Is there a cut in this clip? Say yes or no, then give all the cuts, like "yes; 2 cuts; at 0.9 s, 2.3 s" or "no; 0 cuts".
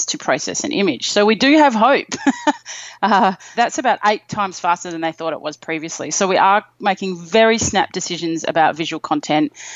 yes; 1 cut; at 3.5 s